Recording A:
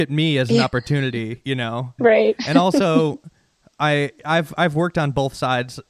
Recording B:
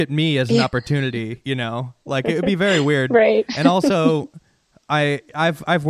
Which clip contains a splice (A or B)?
A